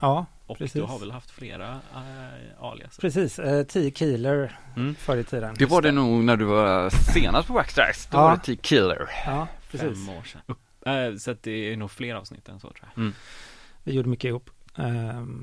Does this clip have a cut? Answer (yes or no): yes